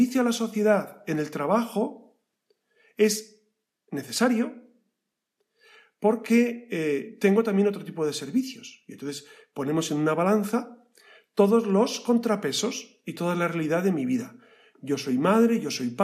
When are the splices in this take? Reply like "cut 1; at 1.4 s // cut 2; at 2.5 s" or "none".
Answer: none